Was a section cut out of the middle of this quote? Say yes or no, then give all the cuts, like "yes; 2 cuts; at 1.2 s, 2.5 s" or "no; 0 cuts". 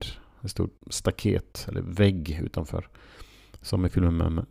no; 0 cuts